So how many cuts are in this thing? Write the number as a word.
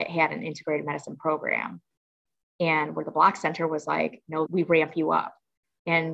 two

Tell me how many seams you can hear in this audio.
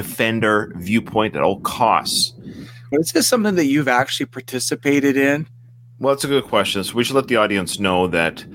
one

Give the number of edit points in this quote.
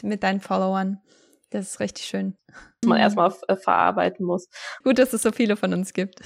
two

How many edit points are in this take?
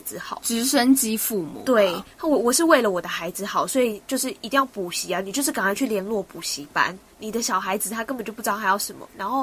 one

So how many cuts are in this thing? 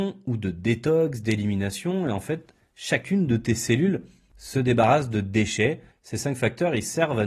one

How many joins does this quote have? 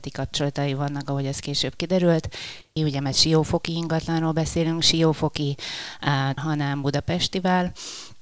two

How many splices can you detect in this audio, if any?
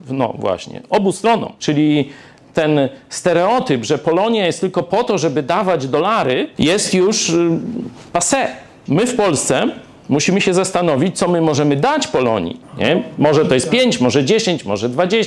two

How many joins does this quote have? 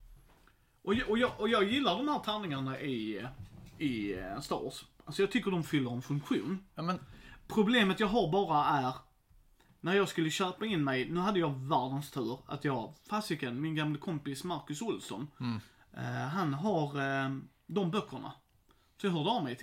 zero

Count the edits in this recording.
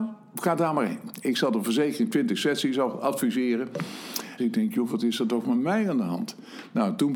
one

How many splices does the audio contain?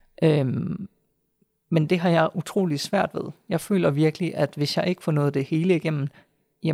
zero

